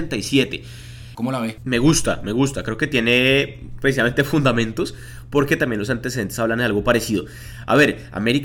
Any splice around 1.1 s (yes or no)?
yes